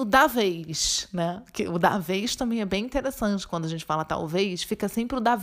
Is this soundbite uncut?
yes; 0 cuts

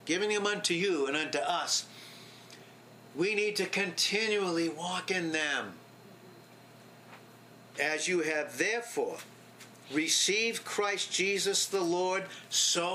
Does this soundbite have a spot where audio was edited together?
yes; 1 cut; at 7.7 s

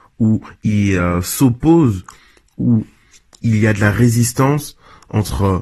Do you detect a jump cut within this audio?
no; 0 cuts

